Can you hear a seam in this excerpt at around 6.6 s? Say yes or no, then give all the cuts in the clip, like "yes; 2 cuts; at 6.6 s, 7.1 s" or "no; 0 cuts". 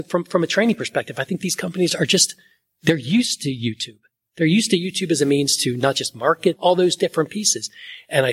yes; 1 cut; at 6.6 s